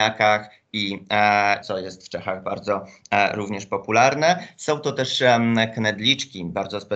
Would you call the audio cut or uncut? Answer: cut